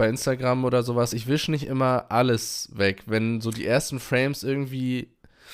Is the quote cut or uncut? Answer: uncut